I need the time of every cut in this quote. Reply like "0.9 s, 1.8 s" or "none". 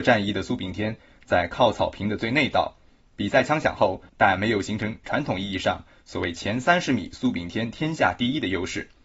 3.0 s, 4.1 s